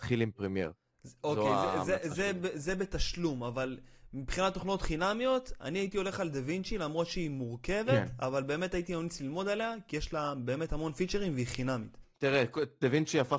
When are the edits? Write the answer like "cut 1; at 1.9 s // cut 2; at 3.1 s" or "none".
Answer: none